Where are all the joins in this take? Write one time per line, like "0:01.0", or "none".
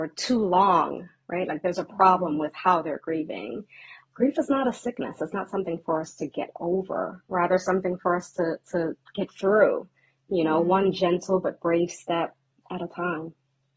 none